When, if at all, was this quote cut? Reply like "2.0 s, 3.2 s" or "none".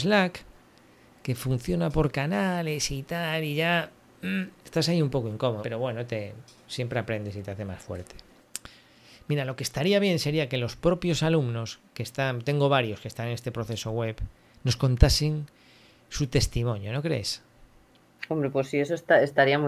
5.6 s